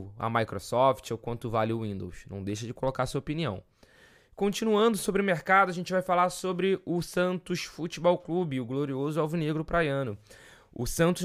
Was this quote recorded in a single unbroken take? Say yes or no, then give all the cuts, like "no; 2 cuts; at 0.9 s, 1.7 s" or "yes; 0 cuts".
yes; 0 cuts